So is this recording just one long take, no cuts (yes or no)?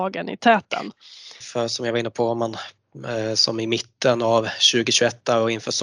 no